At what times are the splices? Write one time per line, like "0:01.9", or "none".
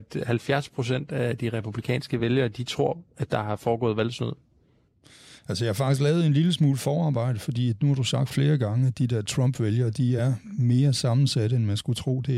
none